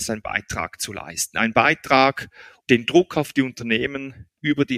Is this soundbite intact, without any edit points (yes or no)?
no